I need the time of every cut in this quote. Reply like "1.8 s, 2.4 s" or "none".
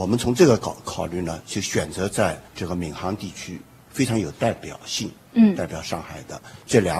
2.5 s